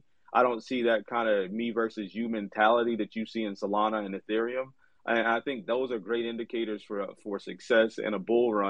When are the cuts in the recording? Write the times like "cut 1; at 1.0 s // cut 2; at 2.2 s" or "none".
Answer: none